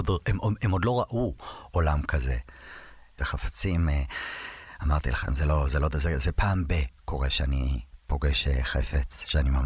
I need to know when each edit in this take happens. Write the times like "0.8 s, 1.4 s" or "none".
3.2 s